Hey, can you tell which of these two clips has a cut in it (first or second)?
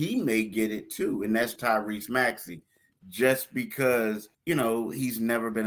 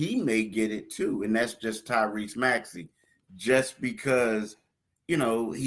first